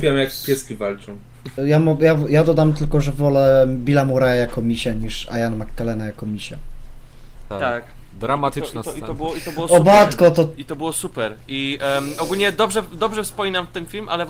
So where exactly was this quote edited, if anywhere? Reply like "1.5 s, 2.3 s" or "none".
1.6 s, 7.5 s